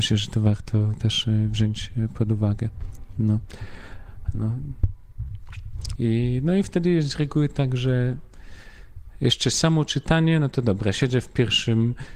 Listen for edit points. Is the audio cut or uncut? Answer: cut